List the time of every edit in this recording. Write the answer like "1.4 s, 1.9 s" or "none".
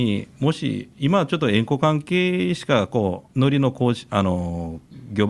3.3 s